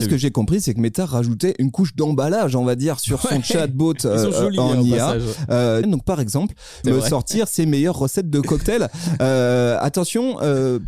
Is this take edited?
yes; 2 cuts; at 5.8 s, 6.8 s

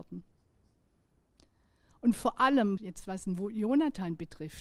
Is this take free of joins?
no; 1 cut; at 2.8 s

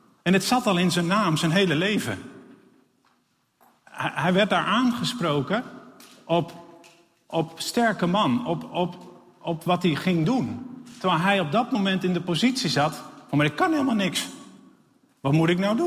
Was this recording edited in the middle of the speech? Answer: no; 0 cuts

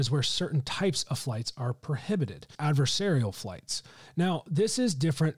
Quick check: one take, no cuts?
no; 1 cut; at 2.5 s

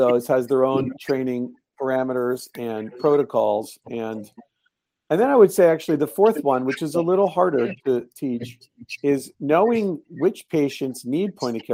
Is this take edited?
no; 0 cuts

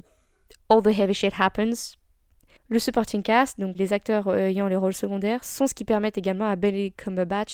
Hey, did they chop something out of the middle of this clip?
yes; 2 cuts; at 2.6 s, 3.7 s

